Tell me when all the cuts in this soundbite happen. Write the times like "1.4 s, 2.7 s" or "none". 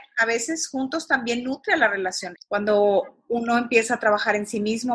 2.4 s